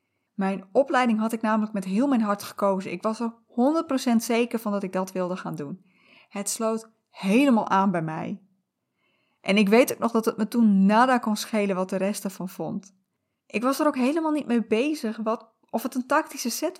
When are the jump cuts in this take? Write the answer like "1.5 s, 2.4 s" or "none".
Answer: 13.3 s